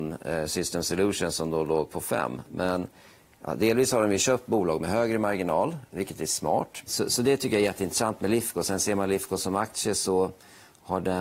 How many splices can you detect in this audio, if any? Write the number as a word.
one